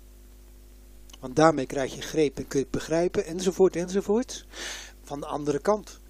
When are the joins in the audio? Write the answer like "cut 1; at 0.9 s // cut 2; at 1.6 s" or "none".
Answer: cut 1; at 5.0 s